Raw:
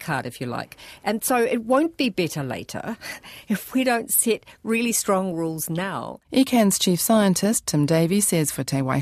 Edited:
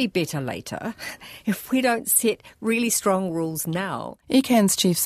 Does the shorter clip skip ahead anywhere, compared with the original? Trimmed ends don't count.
no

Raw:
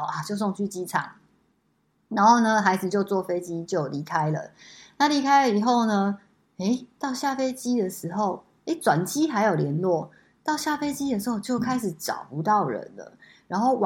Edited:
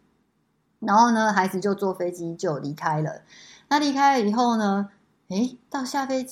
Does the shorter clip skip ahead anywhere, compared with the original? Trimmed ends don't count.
no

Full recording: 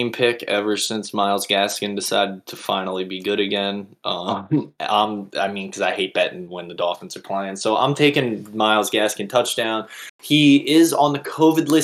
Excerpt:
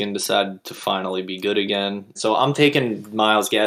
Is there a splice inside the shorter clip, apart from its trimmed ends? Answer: yes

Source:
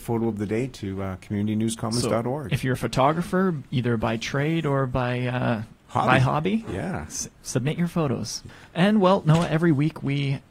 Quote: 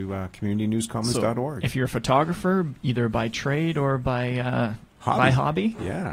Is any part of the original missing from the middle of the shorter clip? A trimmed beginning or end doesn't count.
no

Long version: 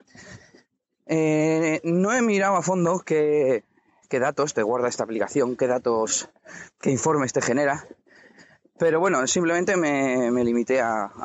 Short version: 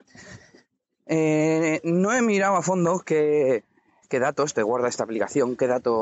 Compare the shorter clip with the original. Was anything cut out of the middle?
no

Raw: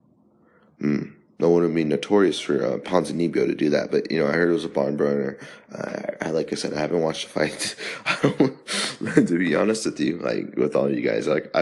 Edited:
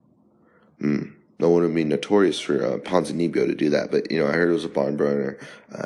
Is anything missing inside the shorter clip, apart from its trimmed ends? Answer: no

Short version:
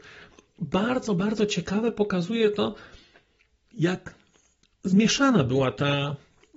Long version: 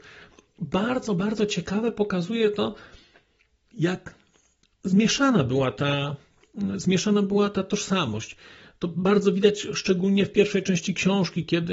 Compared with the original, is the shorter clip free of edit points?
yes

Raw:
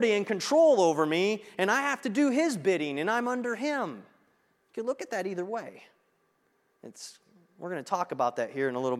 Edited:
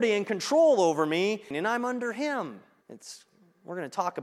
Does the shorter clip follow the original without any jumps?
no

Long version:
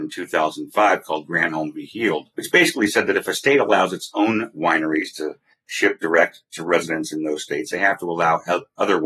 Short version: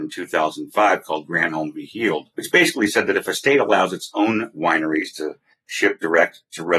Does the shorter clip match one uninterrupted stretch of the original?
yes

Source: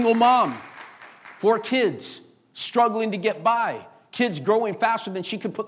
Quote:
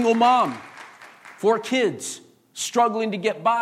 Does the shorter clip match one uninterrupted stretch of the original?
yes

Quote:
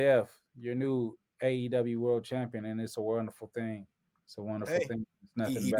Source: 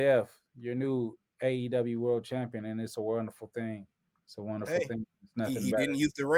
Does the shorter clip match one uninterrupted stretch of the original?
yes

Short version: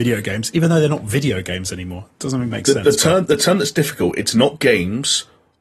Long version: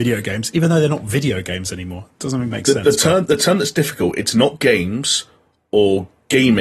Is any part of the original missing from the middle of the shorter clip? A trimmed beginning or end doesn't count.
no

